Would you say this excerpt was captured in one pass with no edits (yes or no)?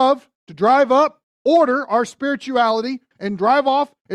no